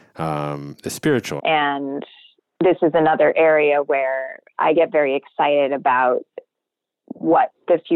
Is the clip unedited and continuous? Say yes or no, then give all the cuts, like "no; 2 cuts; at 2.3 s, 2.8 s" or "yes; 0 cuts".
no; 1 cut; at 1.4 s